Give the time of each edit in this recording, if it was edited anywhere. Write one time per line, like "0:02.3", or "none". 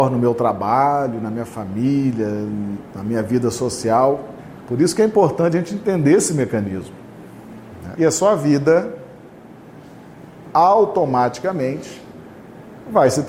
0:04.6
0:08.0